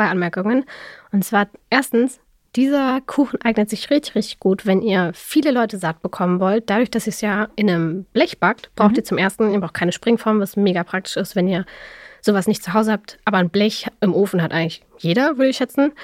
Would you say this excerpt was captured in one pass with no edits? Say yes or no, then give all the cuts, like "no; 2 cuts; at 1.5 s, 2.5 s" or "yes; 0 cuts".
yes; 0 cuts